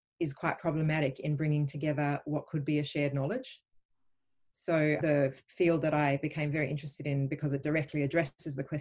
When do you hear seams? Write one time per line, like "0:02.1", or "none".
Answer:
0:05.0